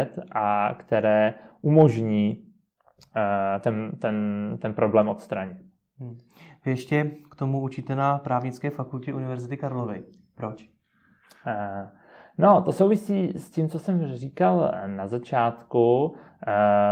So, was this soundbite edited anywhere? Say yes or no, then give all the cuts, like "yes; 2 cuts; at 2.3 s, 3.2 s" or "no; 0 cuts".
no; 0 cuts